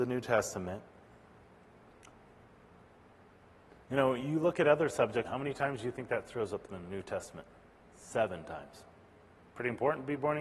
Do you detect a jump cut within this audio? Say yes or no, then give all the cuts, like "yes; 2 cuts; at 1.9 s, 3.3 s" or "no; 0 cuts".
yes; 1 cut; at 5.2 s